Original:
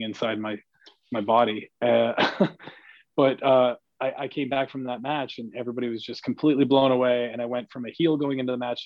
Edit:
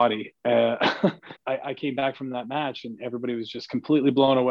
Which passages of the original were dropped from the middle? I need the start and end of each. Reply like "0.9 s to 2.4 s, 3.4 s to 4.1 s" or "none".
2.7 s to 3.9 s